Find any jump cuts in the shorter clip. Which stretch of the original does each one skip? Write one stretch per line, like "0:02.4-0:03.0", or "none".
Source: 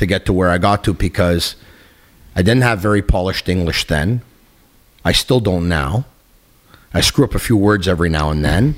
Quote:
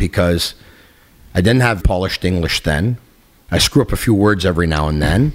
0:02.8-0:03.0
0:04.7-0:06.9